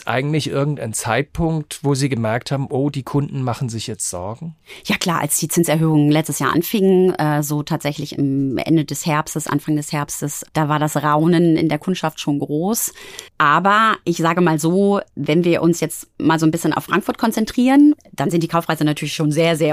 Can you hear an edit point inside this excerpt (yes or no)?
no